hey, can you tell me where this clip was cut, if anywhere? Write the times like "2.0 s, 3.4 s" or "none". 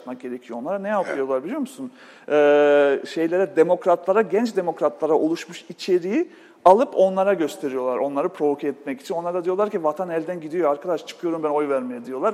none